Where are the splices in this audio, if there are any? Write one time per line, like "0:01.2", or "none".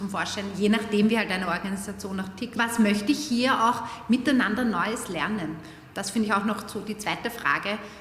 0:02.6